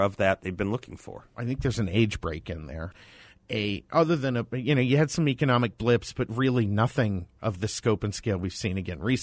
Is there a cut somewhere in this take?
yes; 1 cut; at 2.9 s

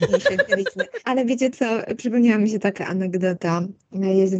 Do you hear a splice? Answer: yes; 1 cut; at 1.0 s

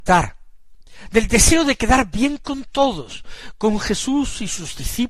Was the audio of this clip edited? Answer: no; 0 cuts

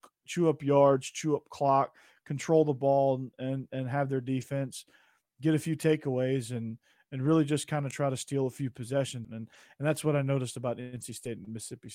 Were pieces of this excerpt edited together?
yes; 1 cut; at 9.2 s

